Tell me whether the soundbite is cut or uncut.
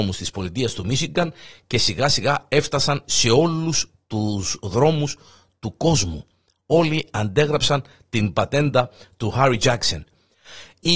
uncut